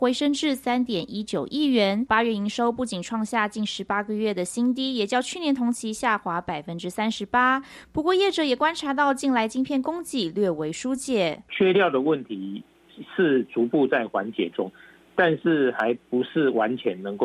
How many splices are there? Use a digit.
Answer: 1